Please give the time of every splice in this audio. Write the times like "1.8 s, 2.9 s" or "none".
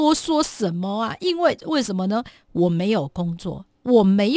none